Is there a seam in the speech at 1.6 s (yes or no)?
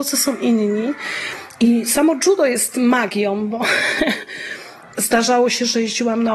no